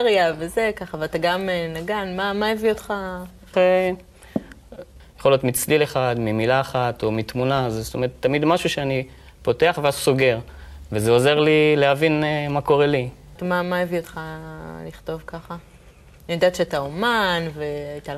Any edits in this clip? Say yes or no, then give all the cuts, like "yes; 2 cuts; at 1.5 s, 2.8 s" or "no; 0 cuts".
yes; 3 cuts; at 3.5 s, 5.0 s, 13.4 s